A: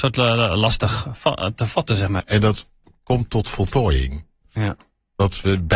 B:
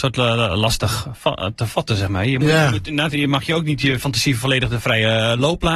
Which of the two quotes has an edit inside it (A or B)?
A